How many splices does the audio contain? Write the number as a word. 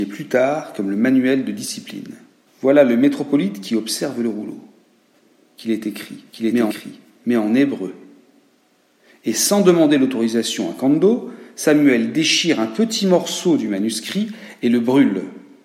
zero